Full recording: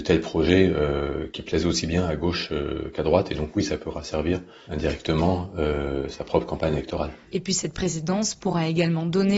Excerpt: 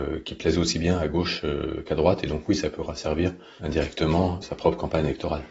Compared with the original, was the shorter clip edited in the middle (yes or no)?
yes